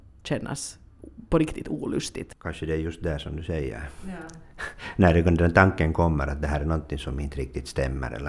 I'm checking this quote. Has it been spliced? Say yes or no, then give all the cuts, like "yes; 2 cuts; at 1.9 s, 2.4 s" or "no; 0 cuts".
no; 0 cuts